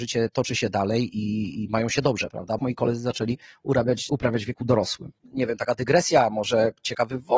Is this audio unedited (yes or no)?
no